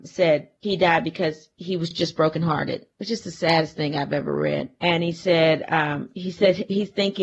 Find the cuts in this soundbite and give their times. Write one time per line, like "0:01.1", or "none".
none